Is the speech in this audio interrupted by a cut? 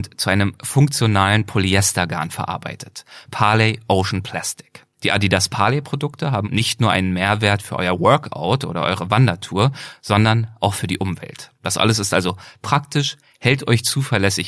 yes; 2 cuts; at 6.4 s, 11.6 s

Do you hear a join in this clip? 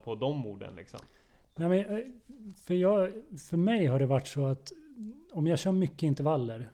no; 0 cuts

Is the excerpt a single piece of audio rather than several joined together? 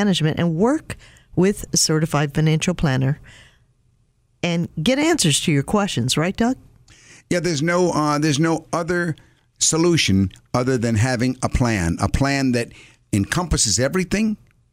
yes; 0 cuts

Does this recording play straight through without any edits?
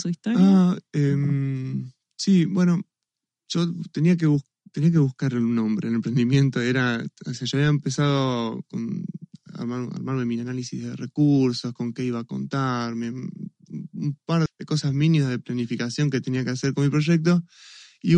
no; 1 cut; at 14.5 s

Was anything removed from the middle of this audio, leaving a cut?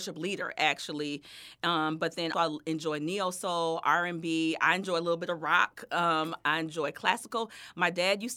yes; 1 cut; at 2.3 s

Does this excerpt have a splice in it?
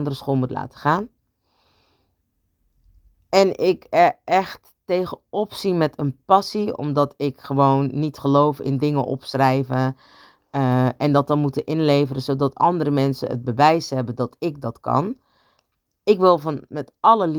no; 0 cuts

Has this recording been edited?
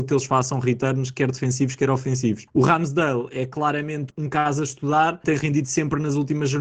no; 0 cuts

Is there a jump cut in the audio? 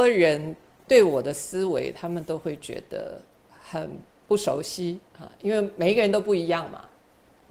yes; 1 cut; at 5.1 s

